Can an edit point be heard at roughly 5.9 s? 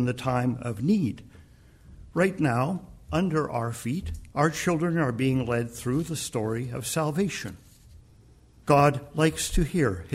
no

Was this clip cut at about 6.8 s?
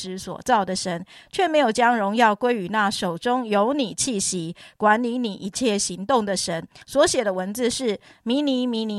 yes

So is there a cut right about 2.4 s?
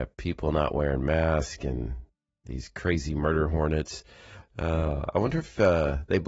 no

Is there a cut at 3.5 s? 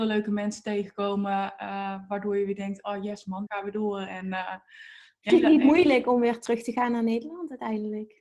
yes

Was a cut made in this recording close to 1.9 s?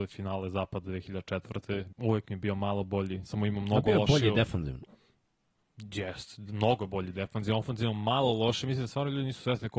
yes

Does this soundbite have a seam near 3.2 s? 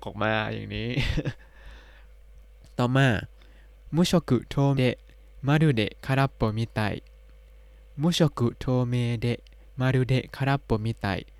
no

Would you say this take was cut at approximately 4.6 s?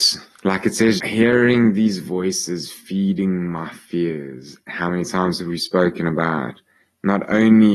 no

